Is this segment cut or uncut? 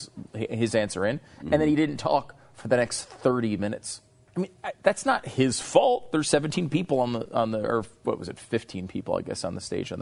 cut